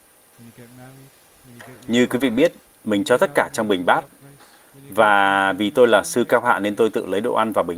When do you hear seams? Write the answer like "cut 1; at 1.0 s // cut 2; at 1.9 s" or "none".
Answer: none